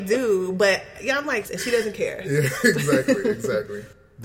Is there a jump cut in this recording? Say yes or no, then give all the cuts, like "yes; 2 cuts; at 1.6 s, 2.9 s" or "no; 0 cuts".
yes; 1 cut; at 1.4 s